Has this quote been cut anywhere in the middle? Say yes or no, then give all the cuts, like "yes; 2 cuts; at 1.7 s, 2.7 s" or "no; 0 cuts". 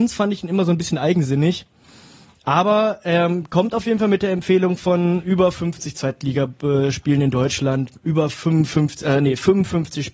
no; 0 cuts